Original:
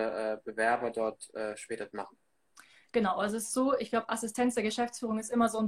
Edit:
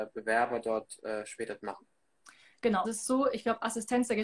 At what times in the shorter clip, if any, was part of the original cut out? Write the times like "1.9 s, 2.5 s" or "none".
2.8 s